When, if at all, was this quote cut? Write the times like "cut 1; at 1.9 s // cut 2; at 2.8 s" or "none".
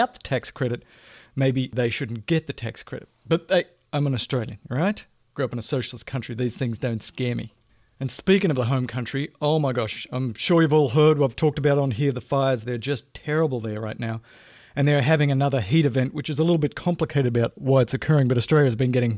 none